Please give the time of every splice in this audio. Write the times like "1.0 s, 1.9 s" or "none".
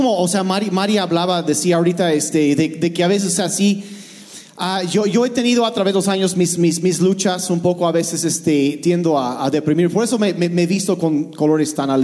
none